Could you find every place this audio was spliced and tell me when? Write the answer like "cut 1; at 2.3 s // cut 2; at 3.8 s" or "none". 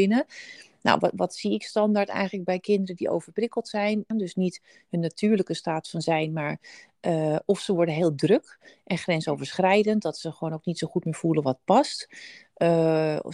cut 1; at 4.1 s